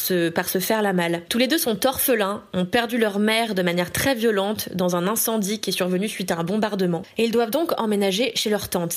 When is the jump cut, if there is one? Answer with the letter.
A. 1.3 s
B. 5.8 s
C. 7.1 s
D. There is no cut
A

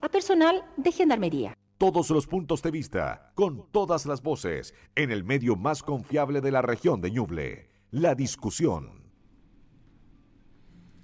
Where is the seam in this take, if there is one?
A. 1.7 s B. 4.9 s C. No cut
A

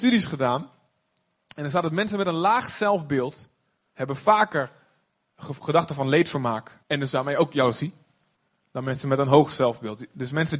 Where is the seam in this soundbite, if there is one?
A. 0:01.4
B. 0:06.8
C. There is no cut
B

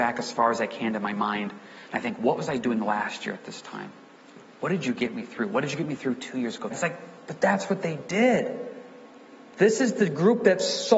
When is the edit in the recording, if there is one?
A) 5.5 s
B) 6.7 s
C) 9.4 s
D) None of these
B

